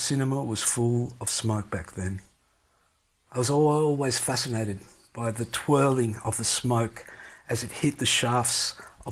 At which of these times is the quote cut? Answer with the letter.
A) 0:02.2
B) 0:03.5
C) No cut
C